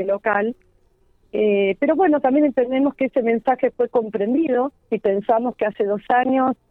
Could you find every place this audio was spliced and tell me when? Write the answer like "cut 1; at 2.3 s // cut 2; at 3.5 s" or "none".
cut 1; at 4.8 s

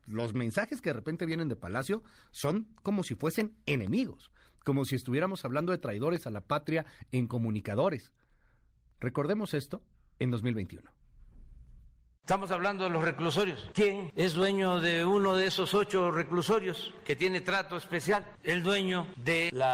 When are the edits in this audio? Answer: none

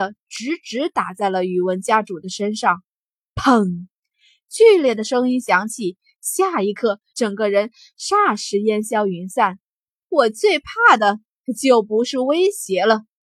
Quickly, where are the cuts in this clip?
cut 1; at 7.1 s // cut 2; at 10.0 s

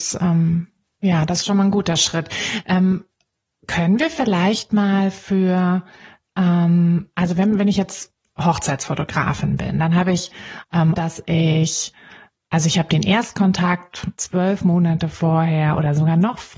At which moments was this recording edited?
cut 1; at 11.0 s // cut 2; at 14.2 s

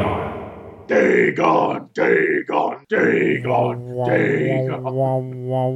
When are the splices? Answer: none

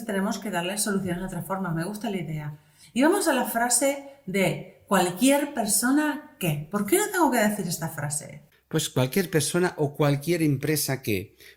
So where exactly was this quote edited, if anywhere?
none

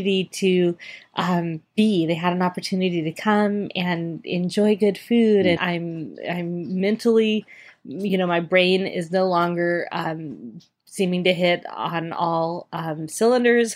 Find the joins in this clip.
cut 1; at 5.6 s

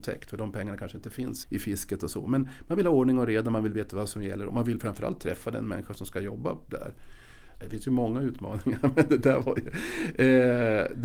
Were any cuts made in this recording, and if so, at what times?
cut 1; at 1.4 s // cut 2; at 7.5 s

